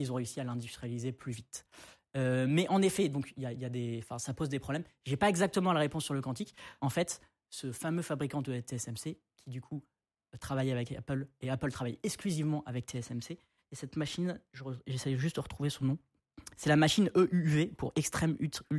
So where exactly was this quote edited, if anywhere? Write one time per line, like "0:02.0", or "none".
0:06.8
0:13.6